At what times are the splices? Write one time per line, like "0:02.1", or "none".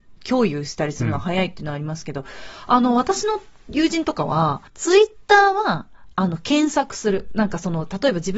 0:04.7